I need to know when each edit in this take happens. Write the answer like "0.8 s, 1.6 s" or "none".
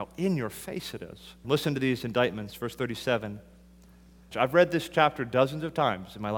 1.4 s, 4.3 s